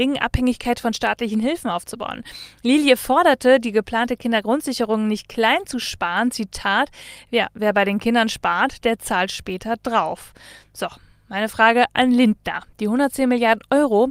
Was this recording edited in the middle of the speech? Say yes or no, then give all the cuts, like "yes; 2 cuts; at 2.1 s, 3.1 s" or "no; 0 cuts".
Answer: no; 0 cuts